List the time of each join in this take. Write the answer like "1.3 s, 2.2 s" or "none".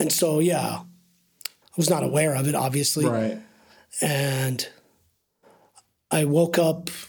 1.6 s

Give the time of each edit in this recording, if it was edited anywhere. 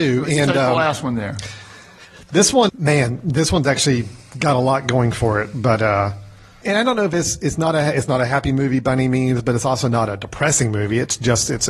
2.7 s, 6.6 s

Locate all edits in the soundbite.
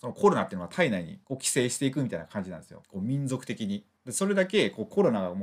2.8 s

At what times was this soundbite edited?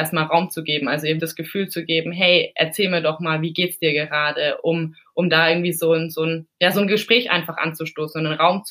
1.2 s

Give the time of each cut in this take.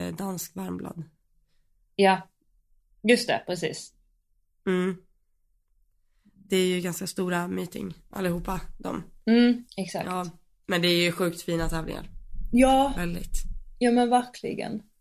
9.7 s

